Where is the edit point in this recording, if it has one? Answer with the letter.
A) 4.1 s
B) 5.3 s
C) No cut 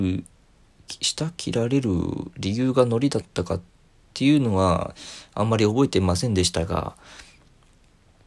C